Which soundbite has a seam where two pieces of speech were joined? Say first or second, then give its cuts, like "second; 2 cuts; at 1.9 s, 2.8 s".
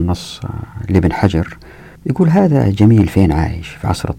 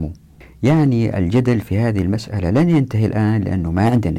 first; 1 cut; at 2.0 s